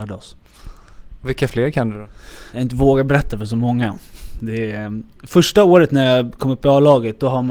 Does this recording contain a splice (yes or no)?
yes